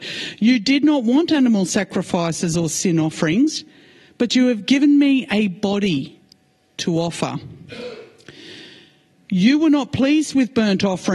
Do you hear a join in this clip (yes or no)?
no